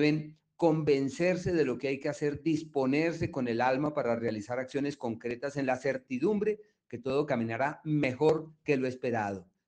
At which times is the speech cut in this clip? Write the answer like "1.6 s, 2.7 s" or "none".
none